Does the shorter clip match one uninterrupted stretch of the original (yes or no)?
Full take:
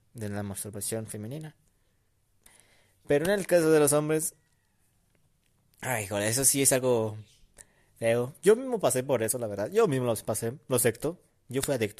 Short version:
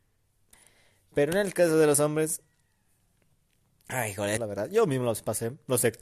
no